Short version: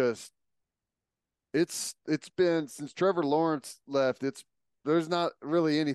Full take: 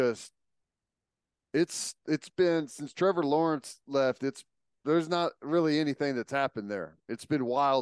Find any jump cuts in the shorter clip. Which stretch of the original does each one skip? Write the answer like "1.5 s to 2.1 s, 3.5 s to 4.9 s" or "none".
none